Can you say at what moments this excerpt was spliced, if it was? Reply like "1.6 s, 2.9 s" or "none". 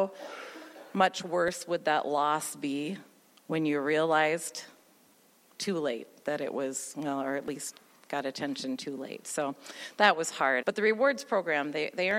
10.6 s

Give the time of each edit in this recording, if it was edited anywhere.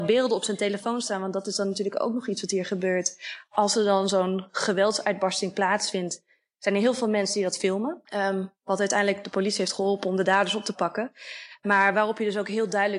8.1 s

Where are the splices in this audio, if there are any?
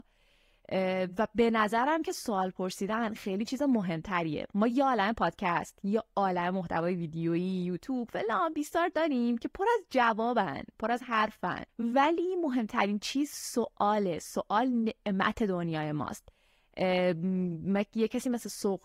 3.2 s, 11.7 s

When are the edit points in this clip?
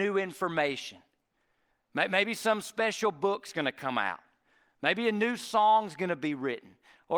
none

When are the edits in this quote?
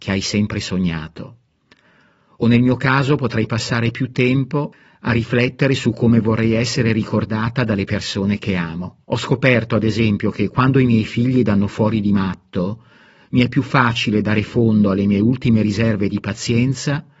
9.0 s

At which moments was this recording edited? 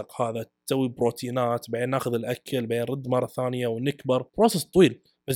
4.3 s

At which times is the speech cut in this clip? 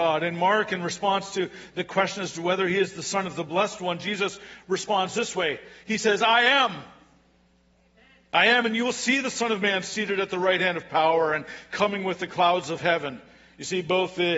none

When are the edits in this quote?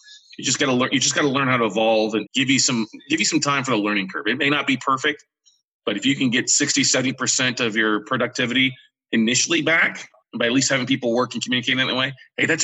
2.3 s

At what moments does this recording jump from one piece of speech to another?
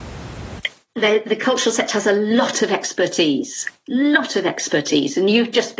none

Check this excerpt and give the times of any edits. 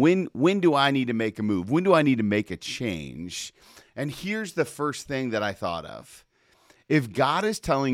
none

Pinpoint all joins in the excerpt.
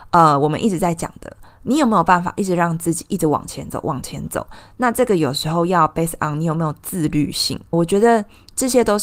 7.7 s

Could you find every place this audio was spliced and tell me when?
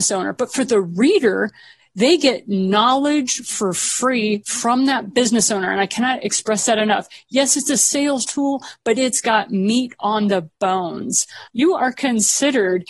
11.5 s

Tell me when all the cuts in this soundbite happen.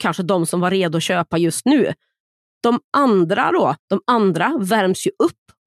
2.4 s, 3.8 s

